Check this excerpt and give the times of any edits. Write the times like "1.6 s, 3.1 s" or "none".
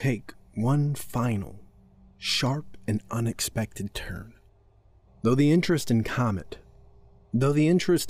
5.1 s

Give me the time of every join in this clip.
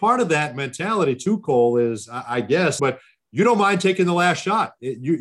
2.8 s

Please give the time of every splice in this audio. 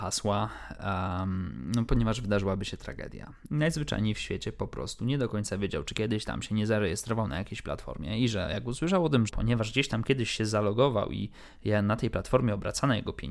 3.5 s, 5.8 s, 9.3 s

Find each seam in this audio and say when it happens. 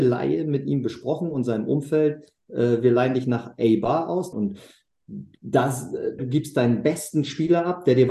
4.3 s, 6.2 s

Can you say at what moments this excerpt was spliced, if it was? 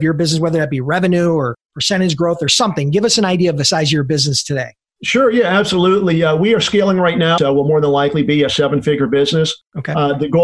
7.4 s

